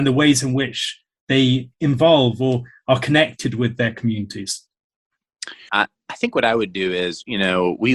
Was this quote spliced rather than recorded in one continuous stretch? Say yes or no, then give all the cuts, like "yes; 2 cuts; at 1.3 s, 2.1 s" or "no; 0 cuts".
yes; 1 cut; at 5.7 s